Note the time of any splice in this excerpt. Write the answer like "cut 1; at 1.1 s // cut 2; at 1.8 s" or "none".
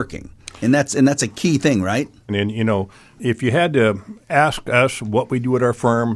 cut 1; at 2.3 s